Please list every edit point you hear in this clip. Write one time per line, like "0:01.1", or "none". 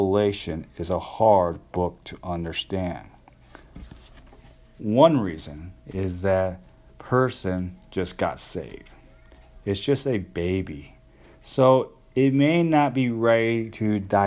none